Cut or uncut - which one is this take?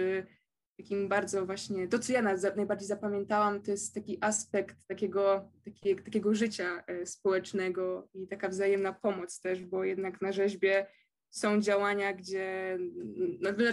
uncut